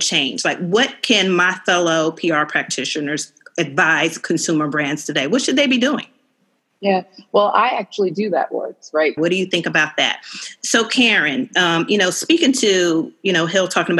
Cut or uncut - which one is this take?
cut